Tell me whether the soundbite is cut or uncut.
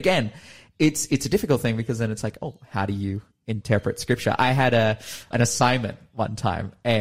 cut